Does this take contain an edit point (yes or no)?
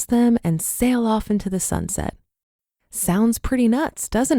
no